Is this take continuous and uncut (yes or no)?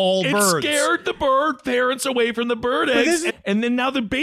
no